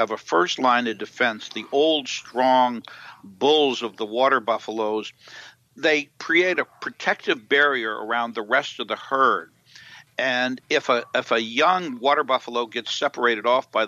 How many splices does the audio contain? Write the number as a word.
zero